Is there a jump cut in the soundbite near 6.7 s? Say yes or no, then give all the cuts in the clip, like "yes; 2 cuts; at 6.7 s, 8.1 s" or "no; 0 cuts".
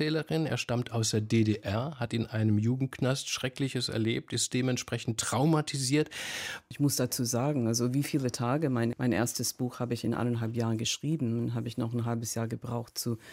yes; 2 cuts; at 6.7 s, 8.9 s